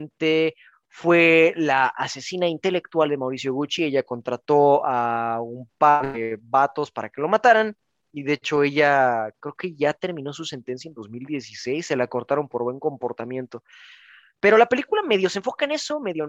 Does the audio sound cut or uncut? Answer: uncut